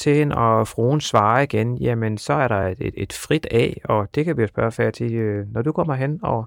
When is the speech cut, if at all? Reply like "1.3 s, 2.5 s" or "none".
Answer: none